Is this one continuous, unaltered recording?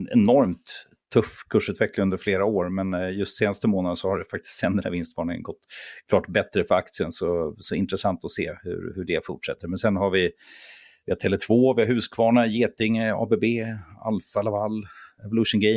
yes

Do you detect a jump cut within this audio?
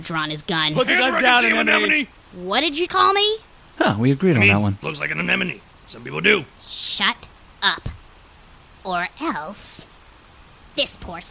yes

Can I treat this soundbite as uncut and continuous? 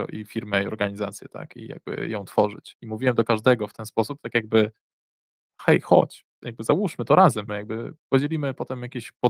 no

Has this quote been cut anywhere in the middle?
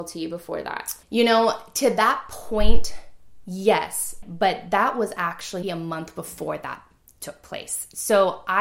yes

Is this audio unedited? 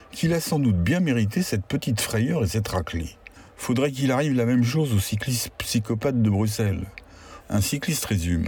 no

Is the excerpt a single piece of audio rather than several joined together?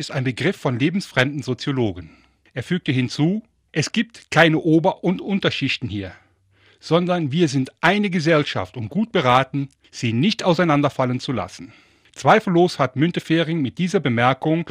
yes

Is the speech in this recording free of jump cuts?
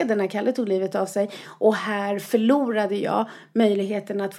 yes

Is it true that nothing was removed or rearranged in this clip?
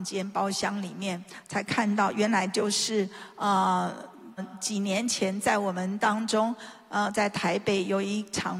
no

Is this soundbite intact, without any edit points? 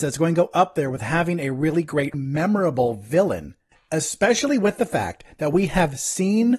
no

